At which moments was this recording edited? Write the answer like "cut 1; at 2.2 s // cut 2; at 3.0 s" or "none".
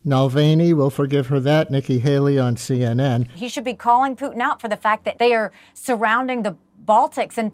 cut 1; at 3.3 s // cut 2; at 5.1 s